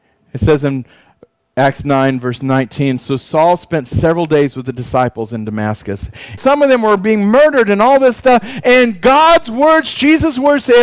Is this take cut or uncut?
cut